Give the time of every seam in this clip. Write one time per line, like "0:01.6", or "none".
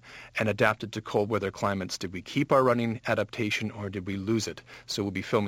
none